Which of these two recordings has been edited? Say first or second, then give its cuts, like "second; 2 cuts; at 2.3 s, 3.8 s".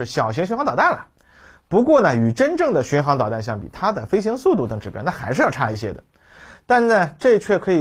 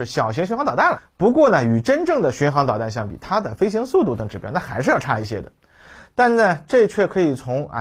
second; 1 cut; at 1.0 s